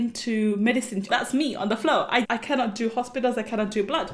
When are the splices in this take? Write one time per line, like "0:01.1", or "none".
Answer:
0:01.1
0:02.2